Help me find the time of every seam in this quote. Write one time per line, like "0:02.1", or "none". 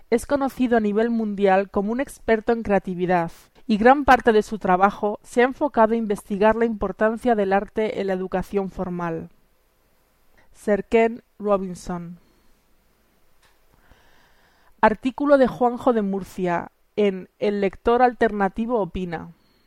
0:03.6
0:10.4